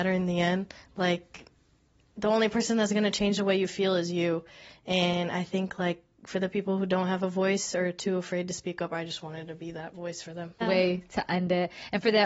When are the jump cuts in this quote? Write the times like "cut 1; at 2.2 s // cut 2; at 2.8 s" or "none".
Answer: cut 1; at 10.6 s